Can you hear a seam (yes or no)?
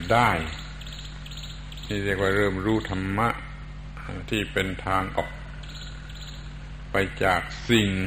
yes